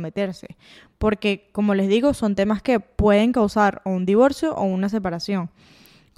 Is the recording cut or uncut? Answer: uncut